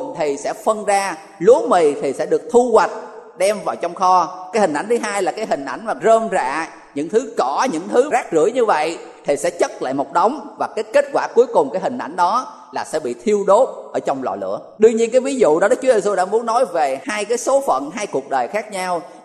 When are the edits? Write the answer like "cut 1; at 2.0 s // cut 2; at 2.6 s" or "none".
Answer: none